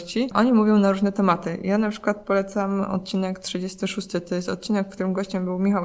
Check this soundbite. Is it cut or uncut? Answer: uncut